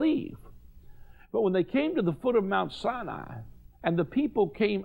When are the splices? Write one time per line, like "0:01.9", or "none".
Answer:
none